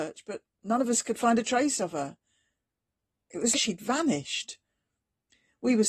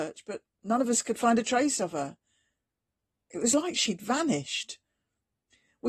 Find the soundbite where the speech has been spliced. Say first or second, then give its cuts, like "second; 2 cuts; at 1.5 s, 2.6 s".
first; 1 cut; at 3.5 s